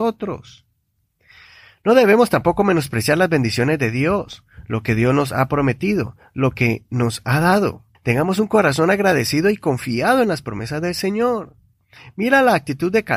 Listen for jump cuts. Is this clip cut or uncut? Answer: cut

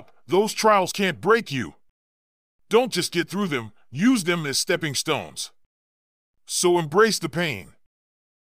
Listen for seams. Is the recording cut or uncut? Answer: cut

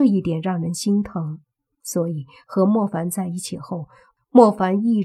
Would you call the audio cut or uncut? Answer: uncut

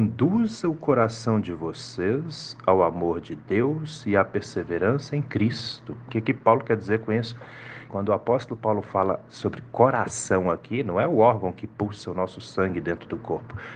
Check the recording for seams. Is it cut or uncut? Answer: cut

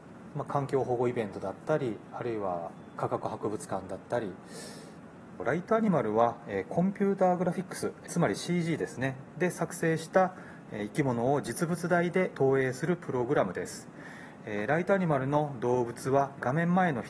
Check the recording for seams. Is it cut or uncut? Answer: uncut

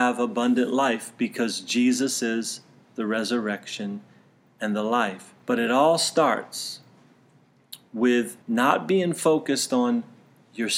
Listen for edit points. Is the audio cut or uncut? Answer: cut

